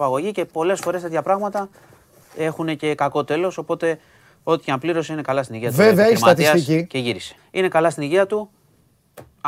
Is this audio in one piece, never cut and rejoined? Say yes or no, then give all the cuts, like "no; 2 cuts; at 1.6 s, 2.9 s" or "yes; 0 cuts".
no; 1 cut; at 7.4 s